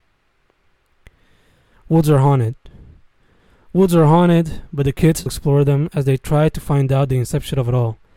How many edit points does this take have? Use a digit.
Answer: 1